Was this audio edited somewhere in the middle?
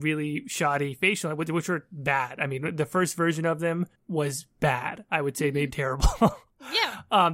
yes; 2 cuts; at 4.0 s, 5.7 s

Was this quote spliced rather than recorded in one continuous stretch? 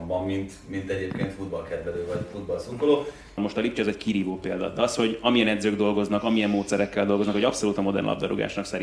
yes; 1 cut; at 3.4 s

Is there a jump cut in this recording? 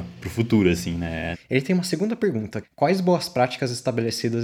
yes; 2 cuts; at 1.3 s, 2.6 s

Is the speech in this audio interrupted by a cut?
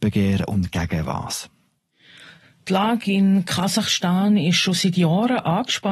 no; 0 cuts

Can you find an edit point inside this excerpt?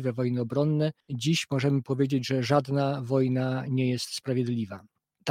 yes; 1 cut; at 1.0 s

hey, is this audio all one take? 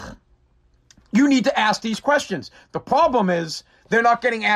yes; 0 cuts

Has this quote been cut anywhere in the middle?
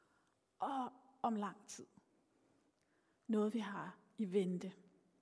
no; 0 cuts

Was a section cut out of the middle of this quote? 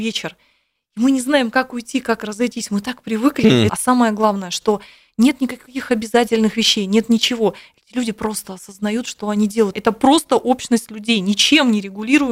yes; 2 cuts; at 3.7 s, 9.7 s

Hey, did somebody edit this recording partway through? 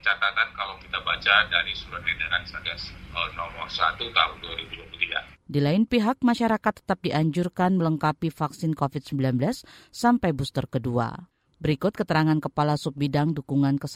yes; 2 cuts; at 5.3 s, 11.4 s

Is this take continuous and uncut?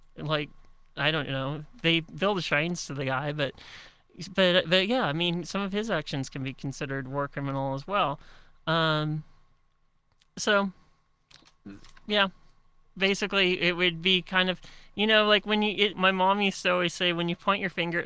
no; 1 cut; at 15.9 s

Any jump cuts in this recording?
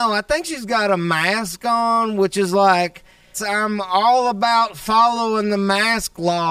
yes; 1 cut; at 3.3 s

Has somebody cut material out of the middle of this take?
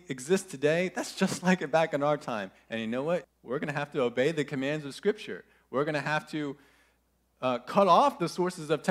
yes; 1 cut; at 3.2 s

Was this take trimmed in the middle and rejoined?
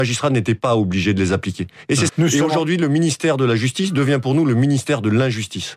yes; 1 cut; at 2.1 s

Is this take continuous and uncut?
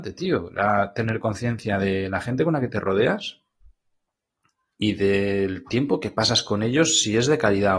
yes; 0 cuts

